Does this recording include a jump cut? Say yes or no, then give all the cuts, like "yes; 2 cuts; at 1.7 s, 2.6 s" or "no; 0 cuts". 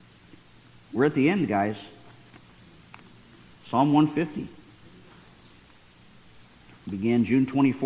no; 0 cuts